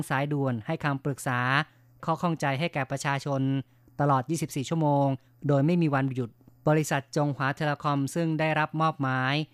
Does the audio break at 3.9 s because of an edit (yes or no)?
no